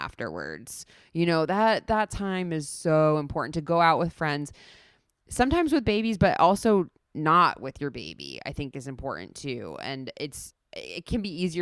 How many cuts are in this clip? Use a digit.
0